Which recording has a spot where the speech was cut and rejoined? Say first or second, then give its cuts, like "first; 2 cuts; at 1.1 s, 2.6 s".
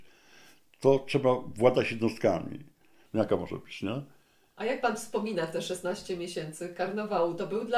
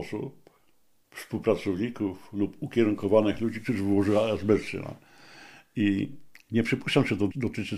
first; 1 cut; at 3.1 s